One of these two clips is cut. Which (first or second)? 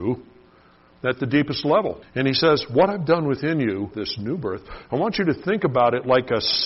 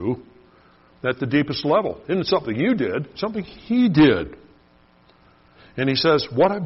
first